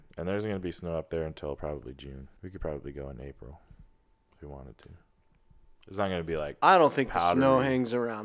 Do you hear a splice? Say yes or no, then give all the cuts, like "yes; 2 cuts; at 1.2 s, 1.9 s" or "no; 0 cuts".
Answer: yes; 1 cut; at 2.4 s